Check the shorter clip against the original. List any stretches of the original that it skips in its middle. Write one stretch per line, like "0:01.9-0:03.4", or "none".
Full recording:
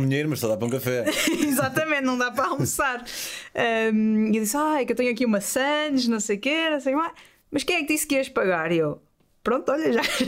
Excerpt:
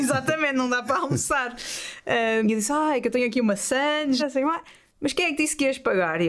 0:03.9-0:04.3
0:06.0-0:06.7